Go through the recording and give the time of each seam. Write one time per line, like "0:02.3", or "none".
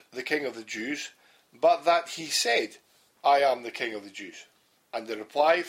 0:04.8